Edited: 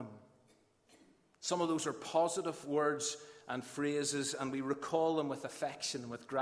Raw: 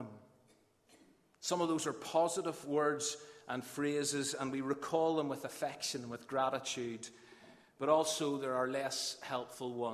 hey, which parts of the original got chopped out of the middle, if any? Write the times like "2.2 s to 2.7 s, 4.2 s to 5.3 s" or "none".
none